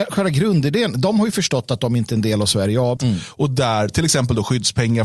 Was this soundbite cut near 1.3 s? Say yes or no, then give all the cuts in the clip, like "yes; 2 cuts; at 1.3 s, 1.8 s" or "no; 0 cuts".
no; 1 cut; at 3.0 s